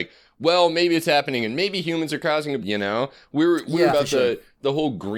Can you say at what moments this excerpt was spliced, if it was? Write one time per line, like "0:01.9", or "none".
0:02.6
0:03.9